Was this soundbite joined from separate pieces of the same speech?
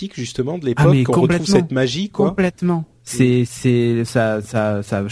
no; 0 cuts

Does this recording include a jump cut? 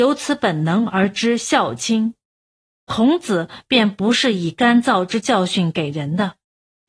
yes; 1 cut; at 2.7 s

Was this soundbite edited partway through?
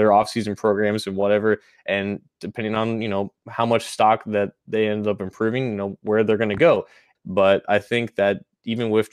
yes; 1 cut; at 7.1 s

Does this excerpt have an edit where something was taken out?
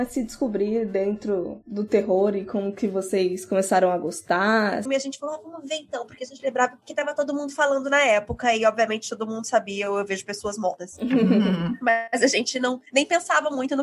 yes; 1 cut; at 4.9 s

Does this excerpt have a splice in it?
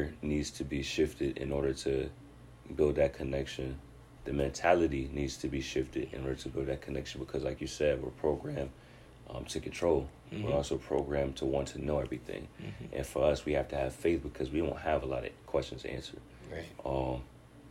yes; 1 cut; at 4.2 s

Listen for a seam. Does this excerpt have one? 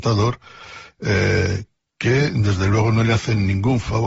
no; 0 cuts

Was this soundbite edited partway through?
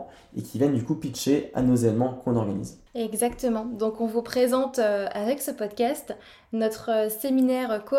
yes; 1 cut; at 2.9 s

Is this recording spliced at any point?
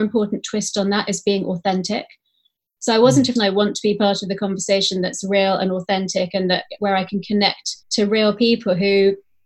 yes; 2 cuts; at 3.4 s, 7.8 s

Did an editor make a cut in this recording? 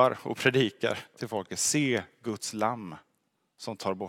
no; 0 cuts

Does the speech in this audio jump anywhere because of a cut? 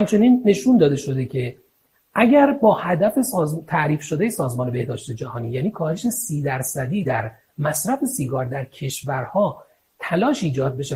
no; 0 cuts

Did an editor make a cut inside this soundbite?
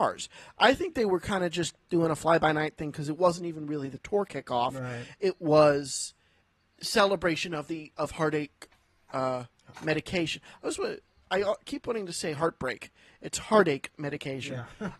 no; 0 cuts

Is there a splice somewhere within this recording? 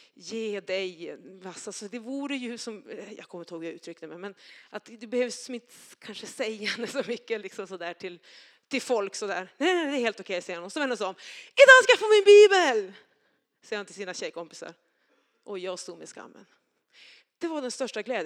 no; 0 cuts

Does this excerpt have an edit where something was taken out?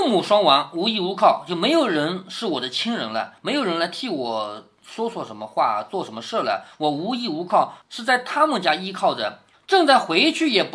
yes; 1 cut; at 9.5 s

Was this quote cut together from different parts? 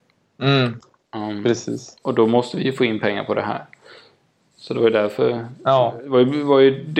no; 0 cuts

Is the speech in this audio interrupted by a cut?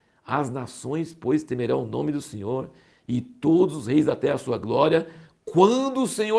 no; 0 cuts

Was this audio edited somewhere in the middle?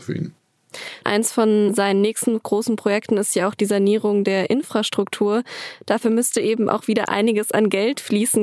no; 0 cuts

